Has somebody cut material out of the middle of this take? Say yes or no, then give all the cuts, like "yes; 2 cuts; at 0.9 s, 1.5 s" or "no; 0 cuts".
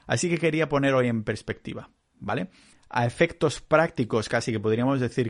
yes; 1 cut; at 2.7 s